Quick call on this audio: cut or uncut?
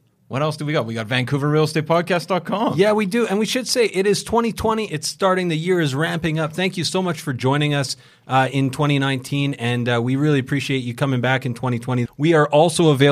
cut